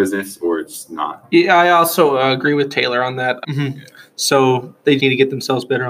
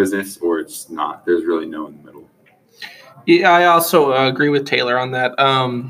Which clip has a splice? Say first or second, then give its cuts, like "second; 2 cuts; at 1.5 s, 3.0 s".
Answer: first; 3 cuts; at 1.2 s, 3.4 s, 5.0 s